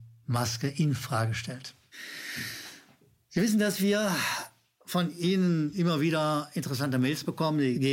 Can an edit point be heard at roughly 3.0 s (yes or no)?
no